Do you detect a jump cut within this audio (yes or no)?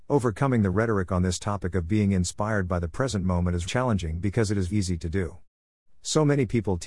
yes